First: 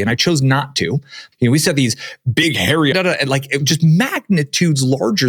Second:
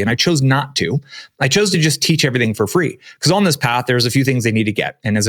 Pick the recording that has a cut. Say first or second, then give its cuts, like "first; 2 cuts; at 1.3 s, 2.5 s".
first; 2 cuts; at 1.3 s, 2.9 s